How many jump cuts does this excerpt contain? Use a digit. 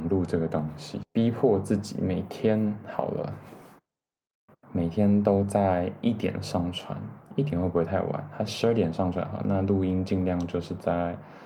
1